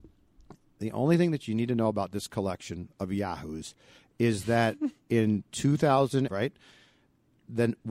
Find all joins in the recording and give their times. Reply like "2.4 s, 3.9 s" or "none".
6.3 s